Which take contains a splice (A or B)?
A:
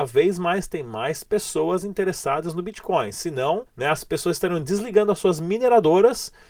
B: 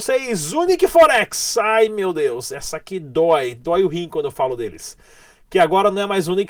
A